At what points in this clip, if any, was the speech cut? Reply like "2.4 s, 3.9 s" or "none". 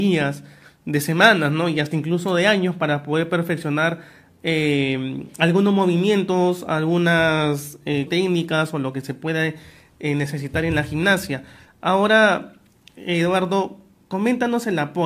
8.1 s